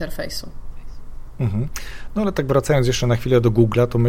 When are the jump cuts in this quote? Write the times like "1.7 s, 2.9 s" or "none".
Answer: none